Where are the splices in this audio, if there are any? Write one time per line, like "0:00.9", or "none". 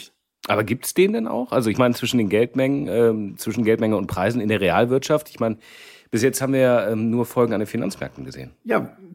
none